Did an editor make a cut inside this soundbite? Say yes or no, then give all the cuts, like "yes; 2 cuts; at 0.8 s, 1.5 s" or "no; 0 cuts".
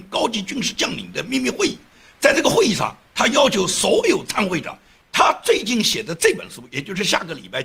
yes; 1 cut; at 5.0 s